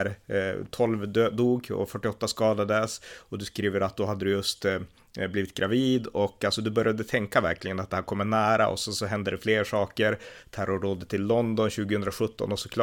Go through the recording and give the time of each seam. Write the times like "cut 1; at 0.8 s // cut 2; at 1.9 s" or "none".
none